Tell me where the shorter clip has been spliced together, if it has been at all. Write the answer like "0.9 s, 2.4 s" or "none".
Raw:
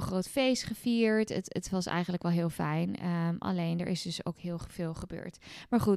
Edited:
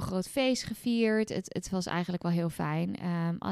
none